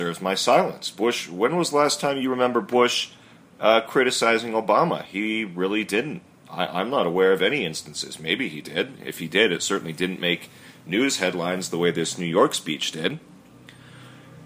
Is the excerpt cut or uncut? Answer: uncut